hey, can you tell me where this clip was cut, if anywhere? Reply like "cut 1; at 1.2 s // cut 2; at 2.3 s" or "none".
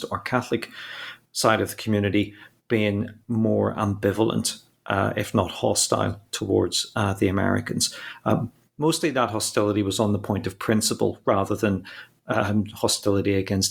none